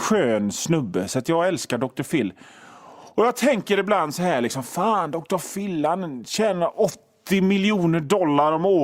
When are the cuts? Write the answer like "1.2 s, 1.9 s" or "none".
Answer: none